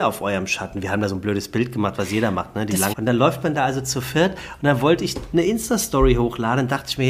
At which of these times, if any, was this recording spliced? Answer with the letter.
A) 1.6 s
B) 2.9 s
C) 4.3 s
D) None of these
B